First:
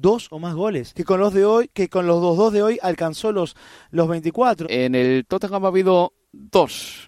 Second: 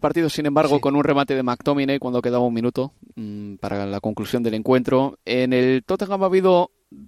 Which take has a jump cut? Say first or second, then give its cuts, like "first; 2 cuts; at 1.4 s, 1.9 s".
first; 2 cuts; at 0.9 s, 4.6 s